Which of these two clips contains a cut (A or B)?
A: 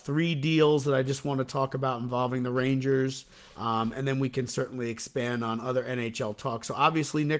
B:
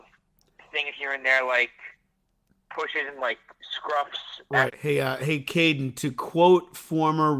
B